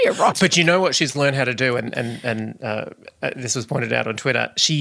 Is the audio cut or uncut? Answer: uncut